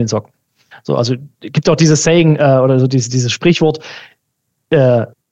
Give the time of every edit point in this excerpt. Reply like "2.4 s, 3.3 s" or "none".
none